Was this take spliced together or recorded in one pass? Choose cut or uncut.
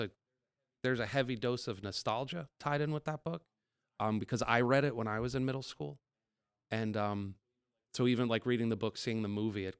uncut